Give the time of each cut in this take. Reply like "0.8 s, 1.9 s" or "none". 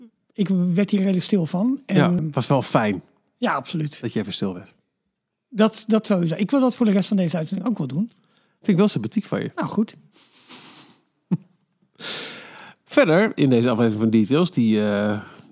2.2 s